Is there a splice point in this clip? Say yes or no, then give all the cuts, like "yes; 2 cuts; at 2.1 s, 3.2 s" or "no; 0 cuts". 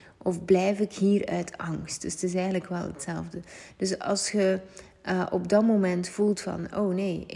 no; 0 cuts